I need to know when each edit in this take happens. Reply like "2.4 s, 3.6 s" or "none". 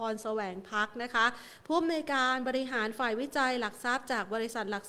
none